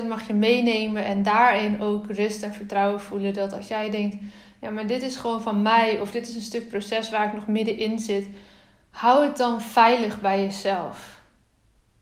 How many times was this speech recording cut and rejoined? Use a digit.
0